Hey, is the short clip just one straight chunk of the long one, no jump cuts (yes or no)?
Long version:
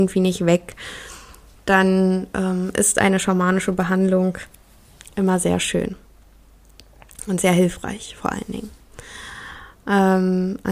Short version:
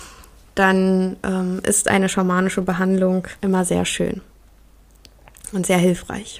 no